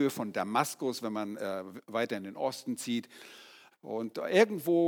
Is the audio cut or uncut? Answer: cut